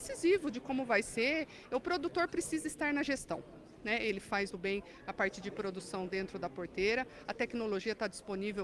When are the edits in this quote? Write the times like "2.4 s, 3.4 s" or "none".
4.5 s